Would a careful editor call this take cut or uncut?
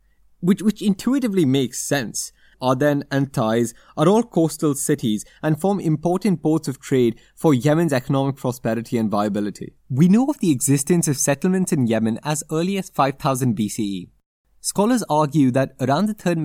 cut